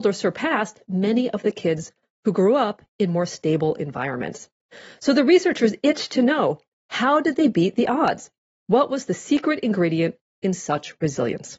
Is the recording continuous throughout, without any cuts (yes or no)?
yes